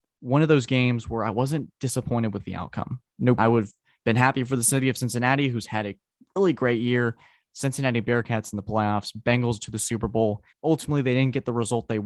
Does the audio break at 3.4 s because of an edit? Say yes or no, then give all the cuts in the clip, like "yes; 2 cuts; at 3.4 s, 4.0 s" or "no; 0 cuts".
yes; 2 cuts; at 3.4 s, 10.5 s